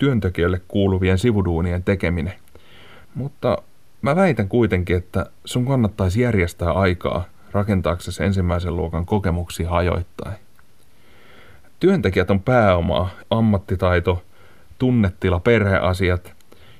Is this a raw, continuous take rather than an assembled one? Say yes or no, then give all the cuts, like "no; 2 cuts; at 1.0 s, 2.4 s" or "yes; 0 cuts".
no; 2 cuts; at 3.0 s, 13.2 s